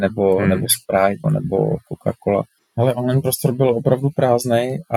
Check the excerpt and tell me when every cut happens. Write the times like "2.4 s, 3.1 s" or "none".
1.2 s, 2.6 s